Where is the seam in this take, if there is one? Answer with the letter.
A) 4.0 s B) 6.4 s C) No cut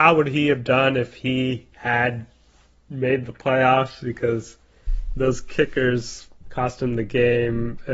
B